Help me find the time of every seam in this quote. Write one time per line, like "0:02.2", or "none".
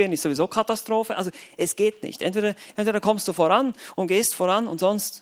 0:02.7